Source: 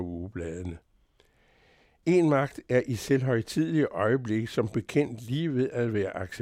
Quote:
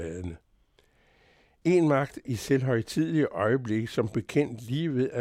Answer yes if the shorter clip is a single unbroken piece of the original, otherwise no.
no